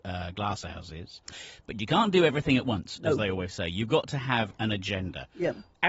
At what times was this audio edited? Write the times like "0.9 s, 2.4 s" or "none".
none